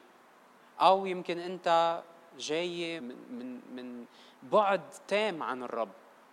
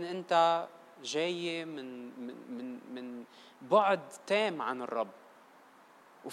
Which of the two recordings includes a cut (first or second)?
first